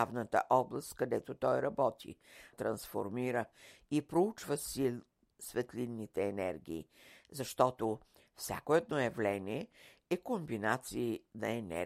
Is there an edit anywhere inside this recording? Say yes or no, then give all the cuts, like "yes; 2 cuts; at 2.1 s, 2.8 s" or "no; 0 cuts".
yes; 1 cut; at 2.5 s